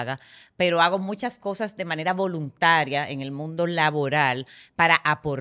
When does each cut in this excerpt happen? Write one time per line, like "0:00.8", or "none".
none